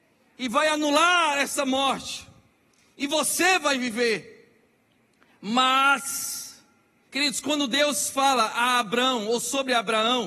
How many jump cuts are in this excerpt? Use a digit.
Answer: 1